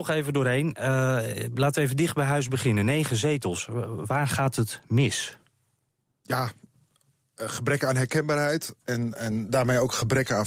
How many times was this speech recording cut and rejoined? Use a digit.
0